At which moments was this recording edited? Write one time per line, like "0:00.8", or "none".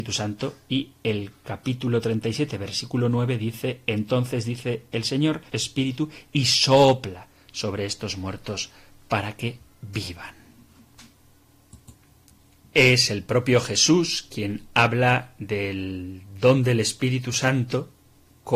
0:05.5